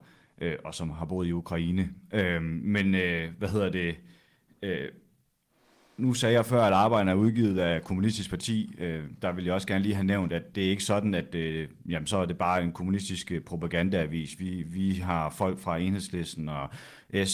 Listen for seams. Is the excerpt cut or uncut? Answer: cut